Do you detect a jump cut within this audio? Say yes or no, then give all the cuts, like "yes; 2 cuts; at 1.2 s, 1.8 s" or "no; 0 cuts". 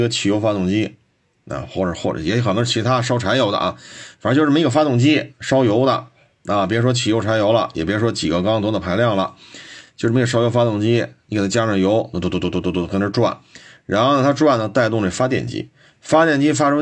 no; 0 cuts